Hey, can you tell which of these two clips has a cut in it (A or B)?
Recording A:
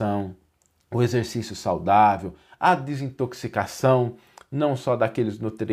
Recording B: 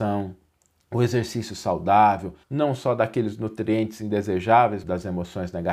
B